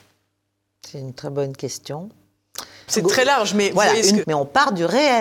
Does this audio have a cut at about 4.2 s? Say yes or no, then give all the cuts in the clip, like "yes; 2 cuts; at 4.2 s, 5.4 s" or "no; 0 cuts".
yes; 2 cuts; at 2.9 s, 4.2 s